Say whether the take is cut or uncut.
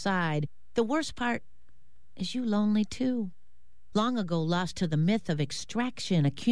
cut